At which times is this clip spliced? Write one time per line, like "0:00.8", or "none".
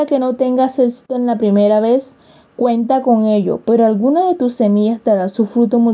none